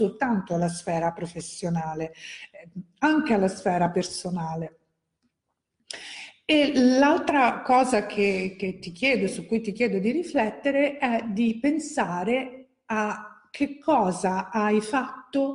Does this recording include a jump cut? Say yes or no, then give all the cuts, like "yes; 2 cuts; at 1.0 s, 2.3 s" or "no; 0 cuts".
no; 0 cuts